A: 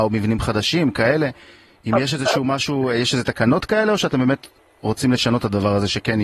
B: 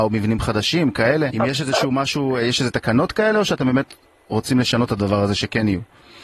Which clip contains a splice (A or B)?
B